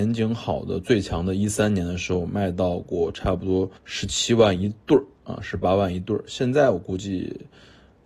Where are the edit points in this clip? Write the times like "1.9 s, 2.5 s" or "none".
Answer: 3.8 s